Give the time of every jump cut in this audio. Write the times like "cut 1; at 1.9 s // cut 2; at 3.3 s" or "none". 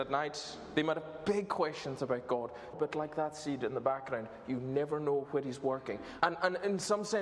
cut 1; at 2.7 s // cut 2; at 6.2 s